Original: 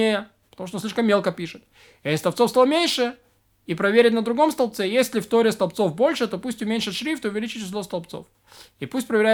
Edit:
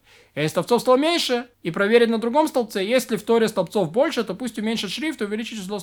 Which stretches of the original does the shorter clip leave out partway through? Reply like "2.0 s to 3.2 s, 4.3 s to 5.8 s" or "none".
3.2 s to 3.6 s